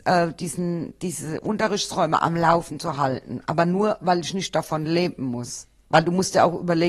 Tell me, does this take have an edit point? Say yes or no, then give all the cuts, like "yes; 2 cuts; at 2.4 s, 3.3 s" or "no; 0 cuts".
no; 0 cuts